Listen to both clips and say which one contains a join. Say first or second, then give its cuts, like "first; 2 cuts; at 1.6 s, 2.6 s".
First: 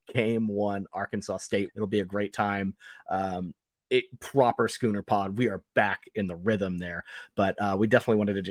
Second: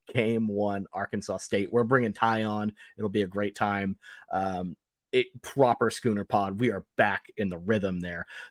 first; 1 cut; at 1.7 s